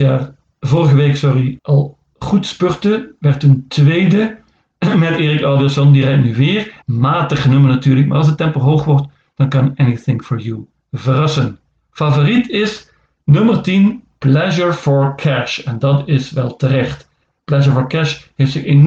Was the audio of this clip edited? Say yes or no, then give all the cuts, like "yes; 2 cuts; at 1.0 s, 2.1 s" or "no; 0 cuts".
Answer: yes; 2 cuts; at 1.6 s, 6.8 s